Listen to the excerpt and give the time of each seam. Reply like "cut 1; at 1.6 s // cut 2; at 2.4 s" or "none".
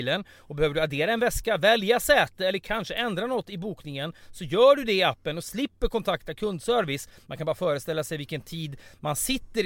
none